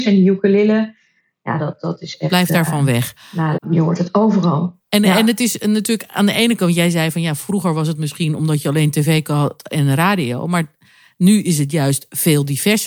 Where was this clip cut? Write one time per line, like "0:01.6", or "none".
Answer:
0:03.6